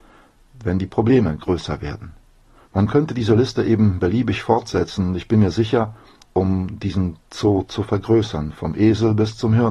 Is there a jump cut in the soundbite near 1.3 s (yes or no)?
no